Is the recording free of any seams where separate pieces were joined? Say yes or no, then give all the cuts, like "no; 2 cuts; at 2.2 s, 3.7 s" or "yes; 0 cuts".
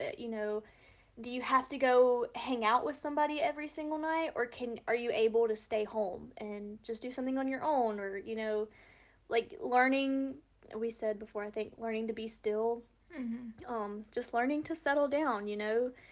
yes; 0 cuts